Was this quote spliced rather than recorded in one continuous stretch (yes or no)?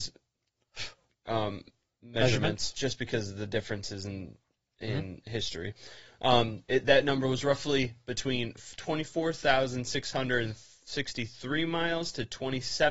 no